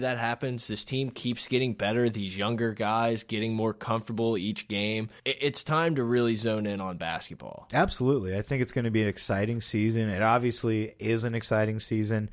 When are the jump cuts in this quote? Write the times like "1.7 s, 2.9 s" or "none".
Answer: 5.2 s